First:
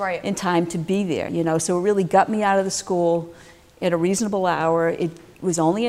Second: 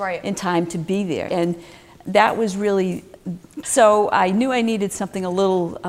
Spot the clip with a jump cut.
second; 2 cuts; at 1.3 s, 3.6 s

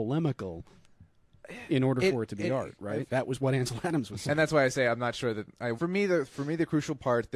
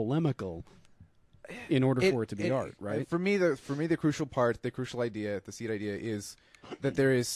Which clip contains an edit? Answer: first; 2 cuts; at 3.1 s, 5.7 s

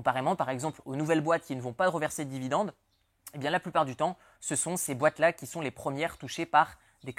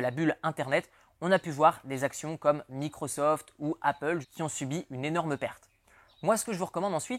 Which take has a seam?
second; 1 cut; at 4.2 s

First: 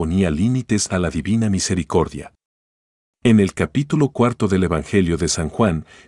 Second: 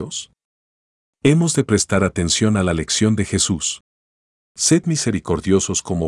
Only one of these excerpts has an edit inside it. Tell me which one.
first; 1 cut; at 3.1 s

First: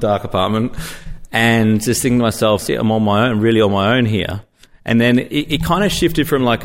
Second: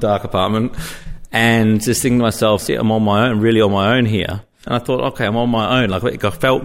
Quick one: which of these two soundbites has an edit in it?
second; 1 cut; at 4.7 s

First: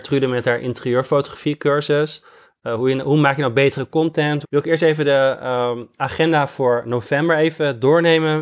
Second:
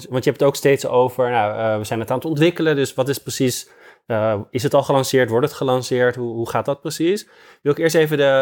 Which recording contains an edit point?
first; 1 cut; at 4.4 s

